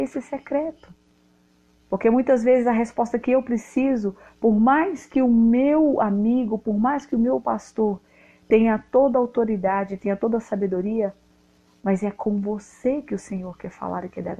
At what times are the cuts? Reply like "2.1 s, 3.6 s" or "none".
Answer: none